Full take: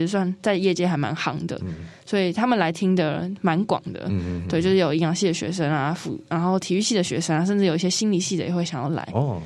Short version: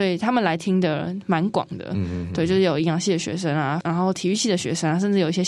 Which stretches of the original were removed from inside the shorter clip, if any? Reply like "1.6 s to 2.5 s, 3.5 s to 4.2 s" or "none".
6.0 s to 6.3 s